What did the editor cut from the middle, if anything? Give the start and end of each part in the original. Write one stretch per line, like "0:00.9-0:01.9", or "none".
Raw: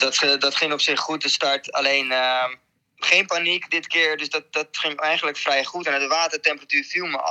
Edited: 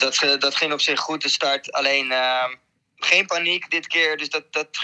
none